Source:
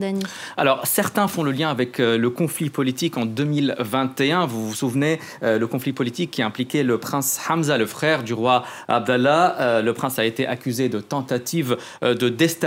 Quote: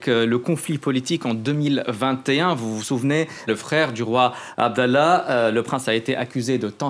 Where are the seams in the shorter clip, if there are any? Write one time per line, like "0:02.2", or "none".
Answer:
0:03.5